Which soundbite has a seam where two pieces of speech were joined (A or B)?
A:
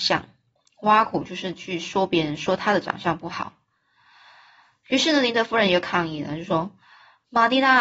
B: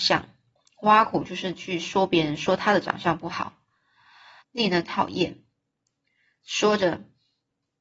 B